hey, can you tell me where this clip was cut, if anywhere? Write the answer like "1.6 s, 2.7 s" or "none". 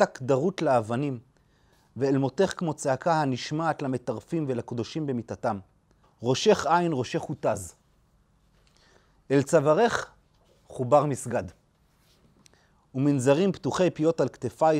6.0 s